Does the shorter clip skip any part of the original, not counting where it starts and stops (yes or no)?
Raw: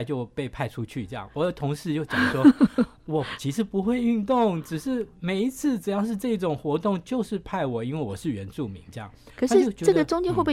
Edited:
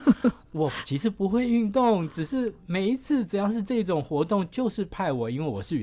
no